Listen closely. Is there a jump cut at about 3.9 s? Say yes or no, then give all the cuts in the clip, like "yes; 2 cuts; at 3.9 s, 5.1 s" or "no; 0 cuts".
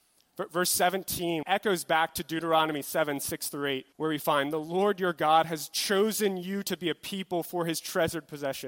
yes; 2 cuts; at 1.4 s, 3.9 s